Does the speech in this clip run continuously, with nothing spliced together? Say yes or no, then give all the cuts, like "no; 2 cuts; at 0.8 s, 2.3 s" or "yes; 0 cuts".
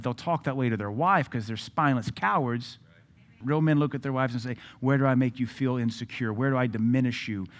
no; 1 cut; at 3.4 s